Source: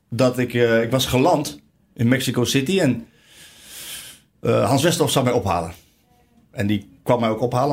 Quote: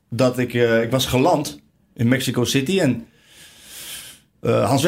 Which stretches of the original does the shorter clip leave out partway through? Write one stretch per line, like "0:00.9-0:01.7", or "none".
none